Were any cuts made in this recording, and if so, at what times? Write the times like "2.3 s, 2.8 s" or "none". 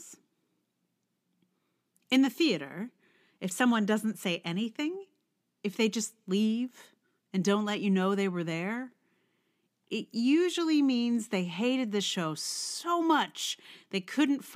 none